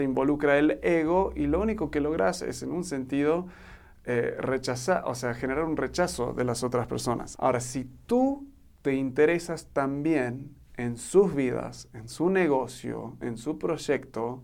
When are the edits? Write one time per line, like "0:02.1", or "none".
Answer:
0:07.3